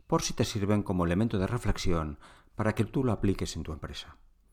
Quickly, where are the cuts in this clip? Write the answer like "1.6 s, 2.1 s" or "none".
none